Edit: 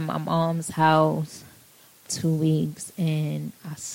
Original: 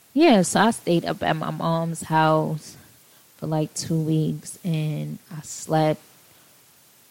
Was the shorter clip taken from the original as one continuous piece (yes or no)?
no